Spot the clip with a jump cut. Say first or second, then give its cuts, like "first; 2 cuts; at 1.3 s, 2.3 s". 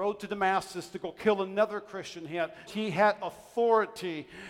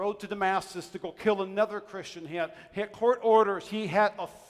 first; 1 cut; at 2.7 s